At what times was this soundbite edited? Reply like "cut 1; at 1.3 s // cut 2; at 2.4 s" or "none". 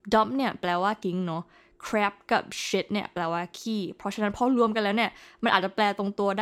cut 1; at 1.0 s